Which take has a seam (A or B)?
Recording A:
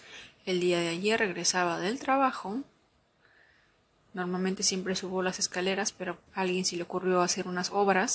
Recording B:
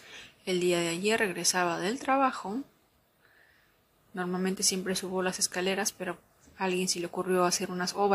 A